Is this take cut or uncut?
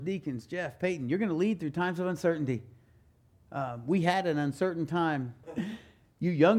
cut